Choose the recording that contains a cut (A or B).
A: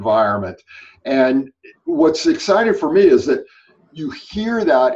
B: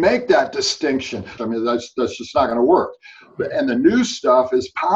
B